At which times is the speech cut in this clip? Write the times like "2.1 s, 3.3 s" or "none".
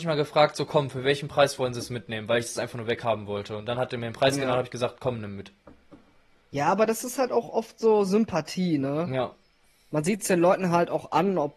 none